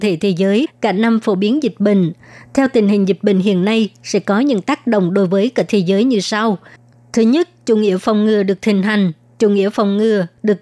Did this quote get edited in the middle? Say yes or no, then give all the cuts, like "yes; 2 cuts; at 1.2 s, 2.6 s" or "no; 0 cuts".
no; 0 cuts